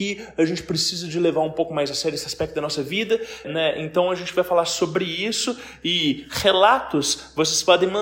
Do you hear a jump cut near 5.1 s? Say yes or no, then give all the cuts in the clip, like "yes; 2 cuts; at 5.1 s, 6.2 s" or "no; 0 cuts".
no; 1 cut; at 3.4 s